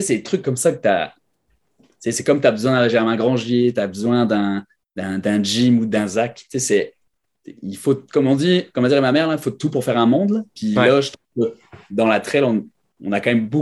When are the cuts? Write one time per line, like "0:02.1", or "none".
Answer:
none